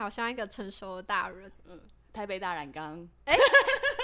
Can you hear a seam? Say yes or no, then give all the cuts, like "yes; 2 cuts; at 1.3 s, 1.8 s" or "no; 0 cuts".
yes; 1 cut; at 1.5 s